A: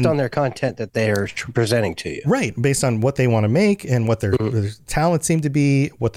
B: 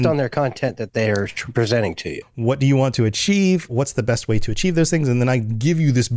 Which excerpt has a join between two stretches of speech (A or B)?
B